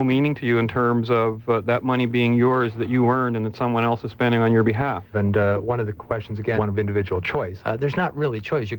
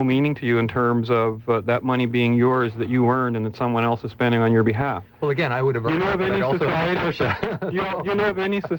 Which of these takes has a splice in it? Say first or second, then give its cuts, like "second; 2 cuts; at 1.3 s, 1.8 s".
first; 3 cuts; at 5.1 s, 6.6 s, 7.6 s